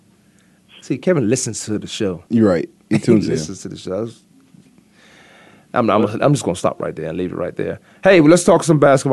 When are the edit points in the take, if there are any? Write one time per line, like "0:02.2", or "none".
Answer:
0:02.3